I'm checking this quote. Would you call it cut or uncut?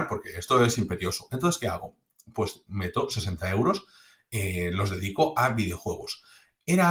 uncut